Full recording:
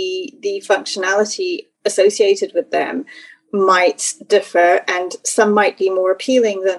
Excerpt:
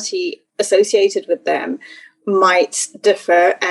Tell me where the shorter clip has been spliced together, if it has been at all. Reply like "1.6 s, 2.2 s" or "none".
none